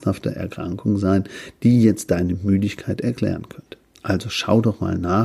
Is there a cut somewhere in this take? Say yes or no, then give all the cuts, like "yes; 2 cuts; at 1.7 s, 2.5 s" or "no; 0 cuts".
no; 0 cuts